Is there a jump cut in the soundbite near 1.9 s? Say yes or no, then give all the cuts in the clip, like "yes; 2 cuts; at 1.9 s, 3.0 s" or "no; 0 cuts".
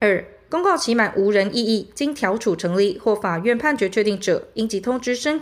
no; 0 cuts